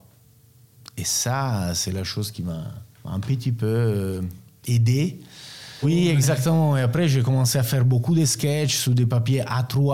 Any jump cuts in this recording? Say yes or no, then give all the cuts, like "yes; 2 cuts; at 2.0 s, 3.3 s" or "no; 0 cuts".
yes; 2 cuts; at 2.9 s, 5.8 s